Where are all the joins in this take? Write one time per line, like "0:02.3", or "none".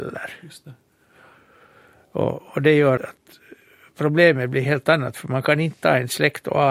0:03.0